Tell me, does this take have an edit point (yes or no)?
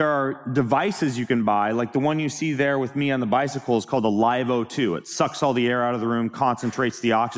no